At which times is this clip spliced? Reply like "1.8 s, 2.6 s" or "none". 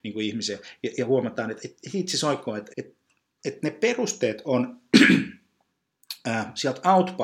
1.6 s, 2.7 s